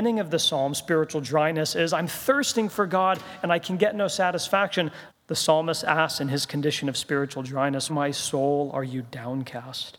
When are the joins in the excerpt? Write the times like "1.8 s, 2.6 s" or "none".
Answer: 5.1 s, 7.9 s